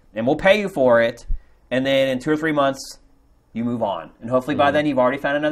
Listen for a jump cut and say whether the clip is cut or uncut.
uncut